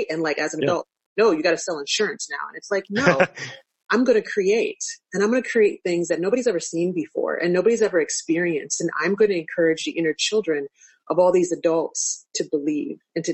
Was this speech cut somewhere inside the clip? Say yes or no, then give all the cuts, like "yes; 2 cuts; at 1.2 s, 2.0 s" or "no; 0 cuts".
no; 0 cuts